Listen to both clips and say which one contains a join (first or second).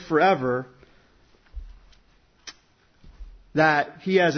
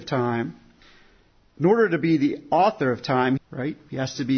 second